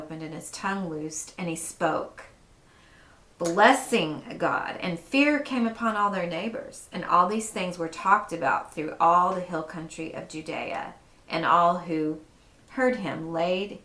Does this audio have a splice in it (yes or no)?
no